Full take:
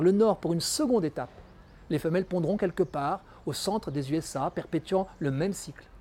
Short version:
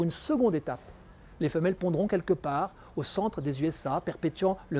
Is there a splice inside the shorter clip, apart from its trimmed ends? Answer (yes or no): no